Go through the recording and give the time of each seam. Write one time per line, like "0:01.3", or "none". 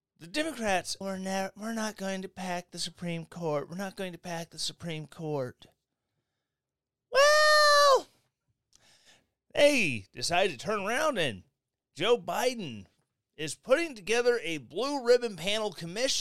0:01.0